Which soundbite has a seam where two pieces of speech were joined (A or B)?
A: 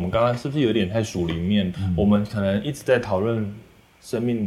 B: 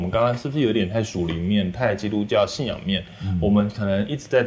A